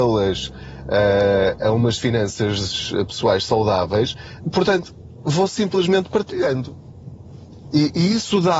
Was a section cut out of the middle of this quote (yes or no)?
no